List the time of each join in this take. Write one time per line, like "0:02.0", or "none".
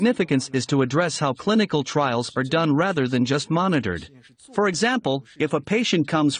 none